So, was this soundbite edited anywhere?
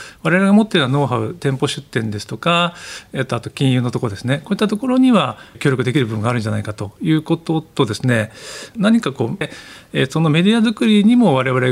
yes; 1 cut; at 9.4 s

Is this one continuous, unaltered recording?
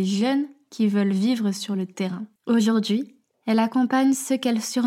no; 1 cut; at 2.4 s

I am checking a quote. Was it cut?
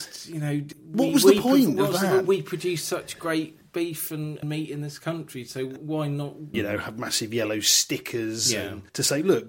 yes; 1 cut; at 6.5 s

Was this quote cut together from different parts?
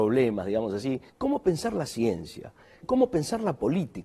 yes; 2 cuts; at 1.1 s, 2.8 s

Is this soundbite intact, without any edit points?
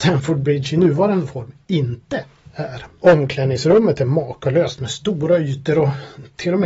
yes; 0 cuts

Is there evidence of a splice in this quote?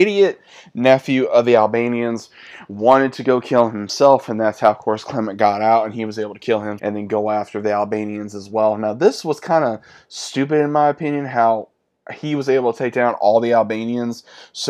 yes; 1 cut; at 6.8 s

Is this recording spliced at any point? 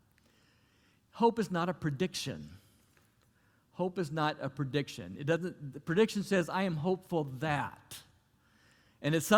no; 0 cuts

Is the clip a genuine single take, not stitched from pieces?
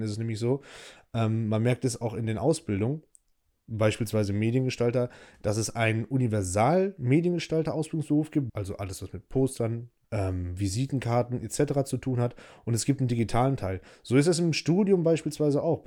no; 2 cuts; at 8.5 s, 10.0 s

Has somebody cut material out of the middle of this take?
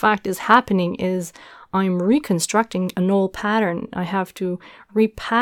no; 0 cuts

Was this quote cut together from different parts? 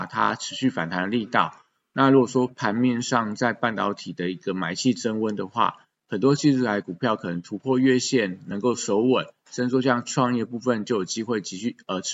no; 0 cuts

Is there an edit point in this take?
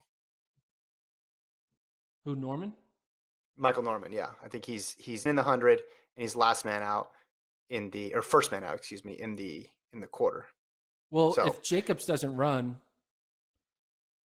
yes; 1 cut; at 5.3 s

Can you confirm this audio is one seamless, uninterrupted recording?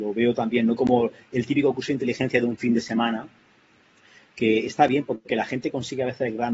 yes; 0 cuts

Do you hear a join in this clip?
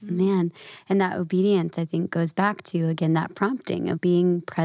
no; 0 cuts

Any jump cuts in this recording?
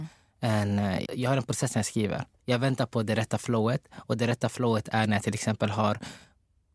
yes; 1 cut; at 1.1 s

